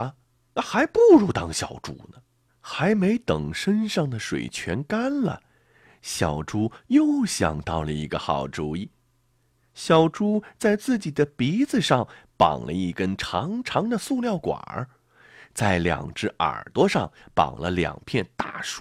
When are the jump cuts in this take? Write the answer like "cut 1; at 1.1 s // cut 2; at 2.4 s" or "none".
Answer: cut 1; at 2.5 s